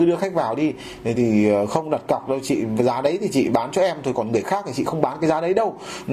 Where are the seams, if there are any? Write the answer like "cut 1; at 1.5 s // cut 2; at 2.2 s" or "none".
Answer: cut 1; at 1.1 s